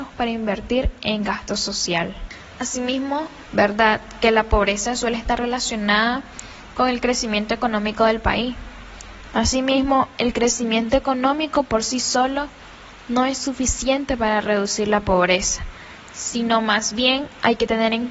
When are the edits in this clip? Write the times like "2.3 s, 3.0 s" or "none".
3.5 s, 9.3 s